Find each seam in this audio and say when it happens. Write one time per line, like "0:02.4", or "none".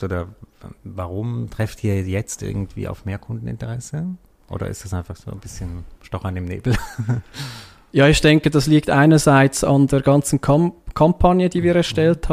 none